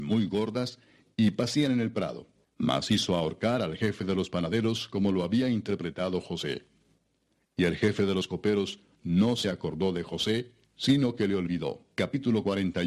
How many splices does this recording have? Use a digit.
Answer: 1